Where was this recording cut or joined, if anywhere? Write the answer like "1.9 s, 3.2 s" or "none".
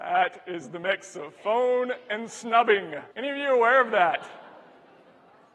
3.1 s